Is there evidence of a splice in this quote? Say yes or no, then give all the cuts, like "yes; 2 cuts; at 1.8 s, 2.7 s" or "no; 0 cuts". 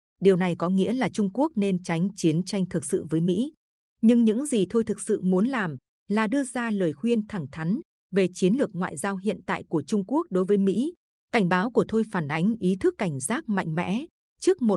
yes; 1 cut; at 11.2 s